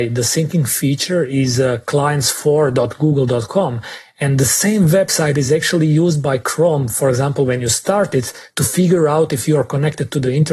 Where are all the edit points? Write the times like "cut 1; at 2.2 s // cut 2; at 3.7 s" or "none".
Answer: none